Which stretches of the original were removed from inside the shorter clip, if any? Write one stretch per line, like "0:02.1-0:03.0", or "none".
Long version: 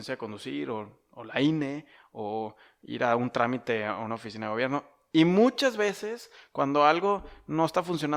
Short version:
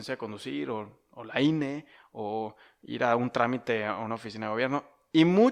none